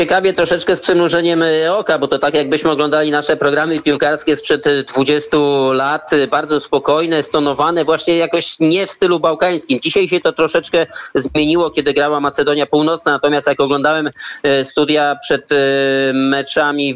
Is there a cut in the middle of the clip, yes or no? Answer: no